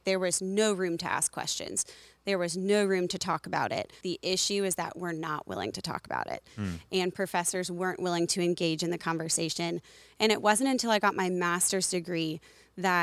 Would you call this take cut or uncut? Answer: cut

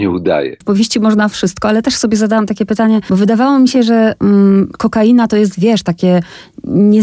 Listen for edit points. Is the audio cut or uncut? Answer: uncut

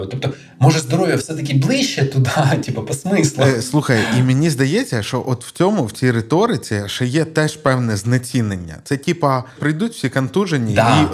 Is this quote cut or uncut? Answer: cut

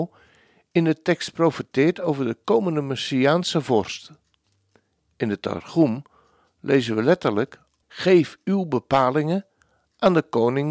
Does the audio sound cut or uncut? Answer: cut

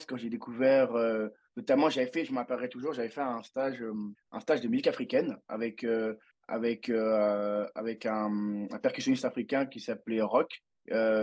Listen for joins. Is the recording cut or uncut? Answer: uncut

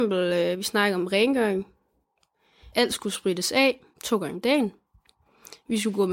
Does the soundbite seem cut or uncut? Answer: cut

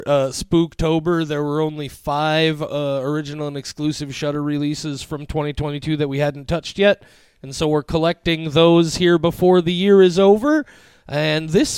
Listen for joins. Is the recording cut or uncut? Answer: uncut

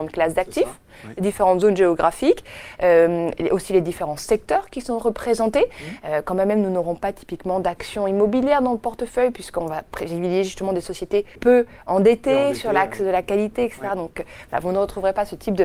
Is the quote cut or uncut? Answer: cut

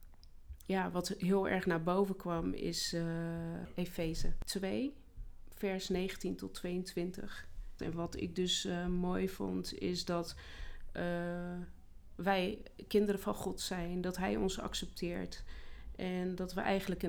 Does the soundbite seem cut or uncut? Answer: cut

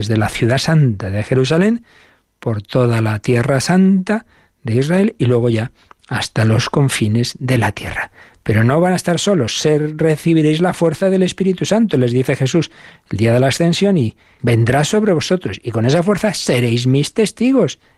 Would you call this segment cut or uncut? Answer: cut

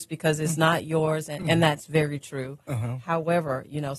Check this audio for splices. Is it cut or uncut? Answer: uncut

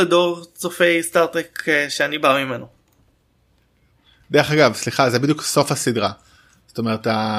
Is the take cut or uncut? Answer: uncut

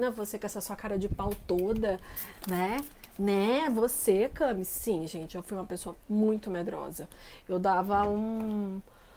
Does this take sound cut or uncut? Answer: uncut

